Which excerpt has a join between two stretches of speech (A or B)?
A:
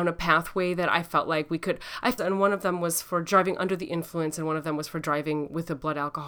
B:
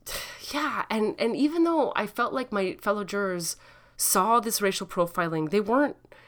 A